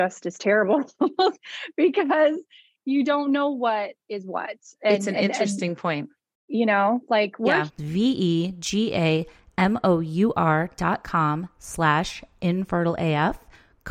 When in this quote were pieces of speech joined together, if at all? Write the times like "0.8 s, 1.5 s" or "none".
7.7 s